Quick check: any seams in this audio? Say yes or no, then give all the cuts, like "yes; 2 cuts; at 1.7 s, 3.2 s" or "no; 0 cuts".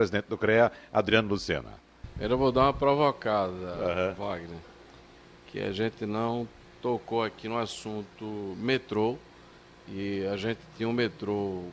no; 0 cuts